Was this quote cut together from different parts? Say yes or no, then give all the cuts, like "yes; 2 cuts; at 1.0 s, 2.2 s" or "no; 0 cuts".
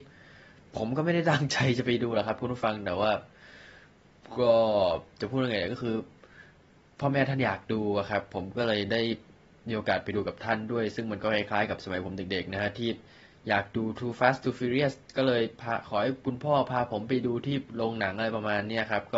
no; 0 cuts